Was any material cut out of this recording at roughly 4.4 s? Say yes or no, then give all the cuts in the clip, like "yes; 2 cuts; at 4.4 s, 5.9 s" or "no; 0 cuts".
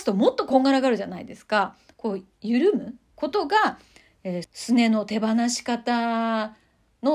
yes; 3 cuts; at 1.9 s, 3.1 s, 4.4 s